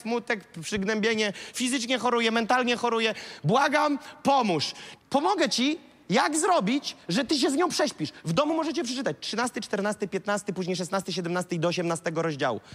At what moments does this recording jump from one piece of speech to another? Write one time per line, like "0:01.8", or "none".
0:05.0